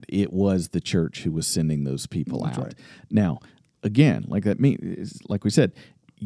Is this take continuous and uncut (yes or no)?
yes